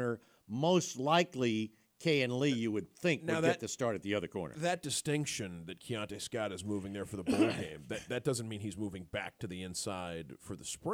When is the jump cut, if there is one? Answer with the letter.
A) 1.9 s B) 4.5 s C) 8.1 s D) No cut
D